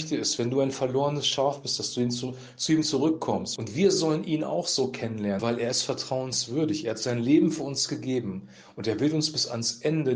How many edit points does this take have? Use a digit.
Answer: 2